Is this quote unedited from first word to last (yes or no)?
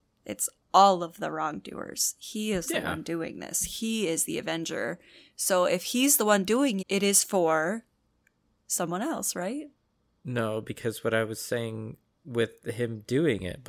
no